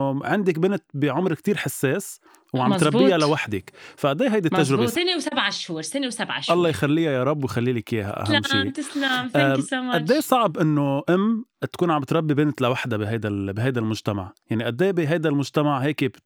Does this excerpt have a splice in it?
yes; 1 cut; at 4.9 s

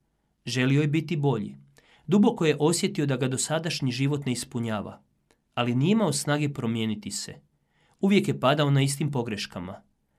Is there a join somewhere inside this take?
no; 0 cuts

